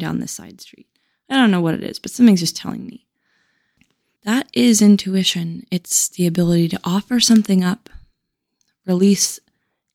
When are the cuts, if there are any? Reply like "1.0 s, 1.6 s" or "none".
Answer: 4.2 s